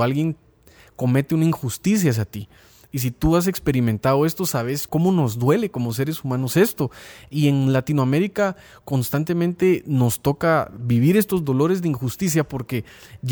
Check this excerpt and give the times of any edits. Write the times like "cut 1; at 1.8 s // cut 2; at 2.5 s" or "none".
cut 1; at 4.9 s